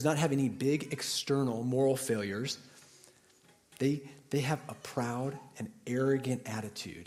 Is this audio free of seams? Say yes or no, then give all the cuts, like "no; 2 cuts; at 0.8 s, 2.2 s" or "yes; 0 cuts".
yes; 0 cuts